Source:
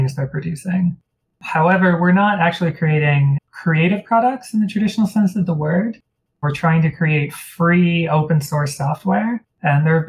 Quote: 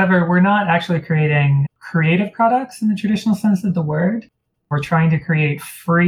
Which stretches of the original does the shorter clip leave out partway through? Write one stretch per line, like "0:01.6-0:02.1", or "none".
none